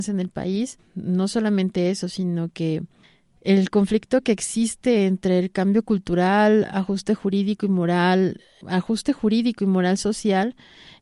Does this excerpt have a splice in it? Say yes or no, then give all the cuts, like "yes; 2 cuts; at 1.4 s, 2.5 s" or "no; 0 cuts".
no; 0 cuts